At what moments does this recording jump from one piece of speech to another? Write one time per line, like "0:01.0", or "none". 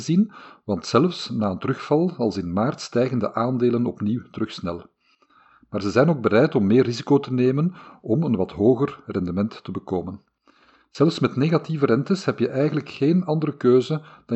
none